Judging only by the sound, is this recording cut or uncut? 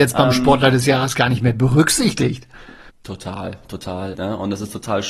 cut